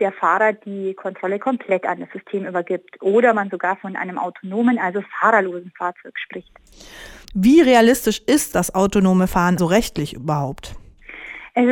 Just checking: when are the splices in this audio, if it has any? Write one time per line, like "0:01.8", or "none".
0:07.2
0:09.6

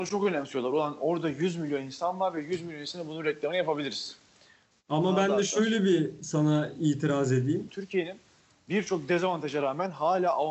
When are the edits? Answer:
0:04.7
0:07.7

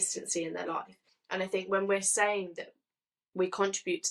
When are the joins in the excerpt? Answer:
0:01.1

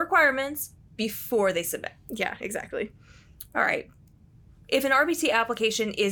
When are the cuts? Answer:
none

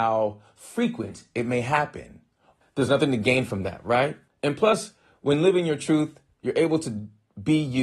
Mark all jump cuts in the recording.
0:02.6
0:04.3

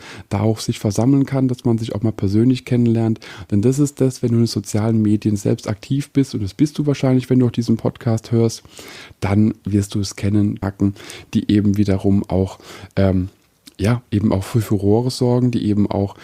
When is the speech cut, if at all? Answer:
0:10.6

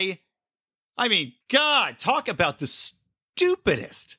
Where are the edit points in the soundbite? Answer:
0:01.4

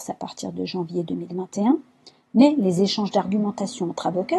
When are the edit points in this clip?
none

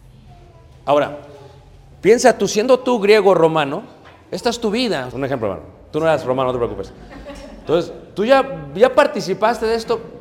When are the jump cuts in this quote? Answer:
0:05.1

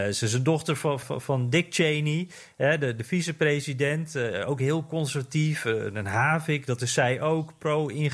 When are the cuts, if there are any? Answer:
0:01.0

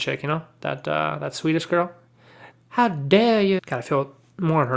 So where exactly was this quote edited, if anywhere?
0:02.5
0:03.6

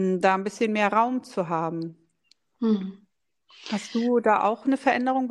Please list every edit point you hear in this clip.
none

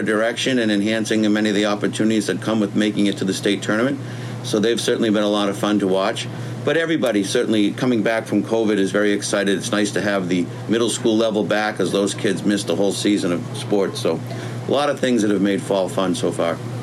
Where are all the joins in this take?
none

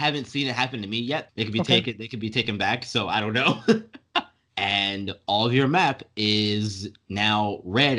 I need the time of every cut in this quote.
0:01.3
0:04.5

